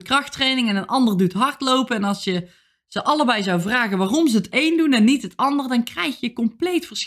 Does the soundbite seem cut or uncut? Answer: uncut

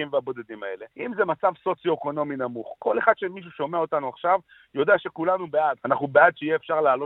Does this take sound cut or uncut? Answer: cut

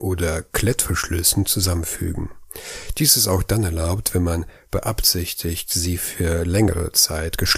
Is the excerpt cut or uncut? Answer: uncut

